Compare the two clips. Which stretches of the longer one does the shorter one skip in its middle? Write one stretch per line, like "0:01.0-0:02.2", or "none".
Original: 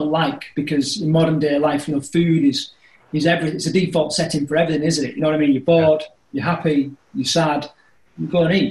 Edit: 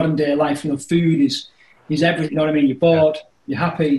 0:03.5-0:05.1